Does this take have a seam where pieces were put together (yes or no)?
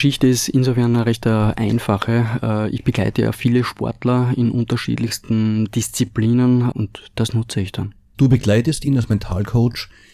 yes